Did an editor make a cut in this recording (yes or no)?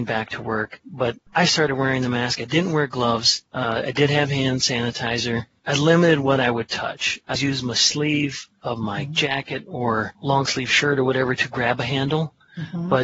yes